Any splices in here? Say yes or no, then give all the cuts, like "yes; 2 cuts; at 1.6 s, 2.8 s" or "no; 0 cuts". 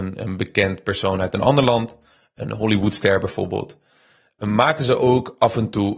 no; 0 cuts